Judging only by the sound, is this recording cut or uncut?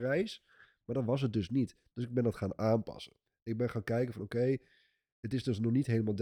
uncut